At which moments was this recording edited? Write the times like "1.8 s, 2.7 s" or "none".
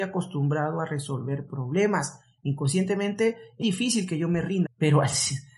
3.6 s, 4.6 s